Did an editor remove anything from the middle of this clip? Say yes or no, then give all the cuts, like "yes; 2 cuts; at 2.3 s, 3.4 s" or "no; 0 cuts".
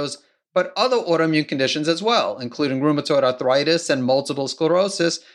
no; 0 cuts